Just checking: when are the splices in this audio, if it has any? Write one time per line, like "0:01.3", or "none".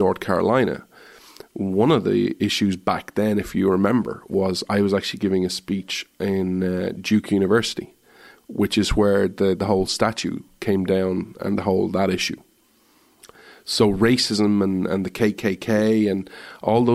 none